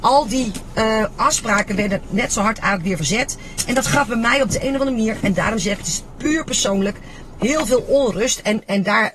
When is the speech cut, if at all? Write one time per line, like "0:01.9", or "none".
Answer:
none